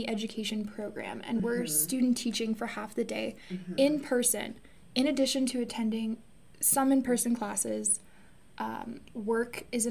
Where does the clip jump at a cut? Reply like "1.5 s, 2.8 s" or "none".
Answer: none